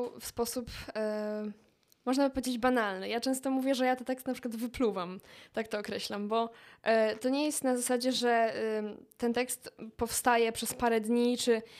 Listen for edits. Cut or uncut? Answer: uncut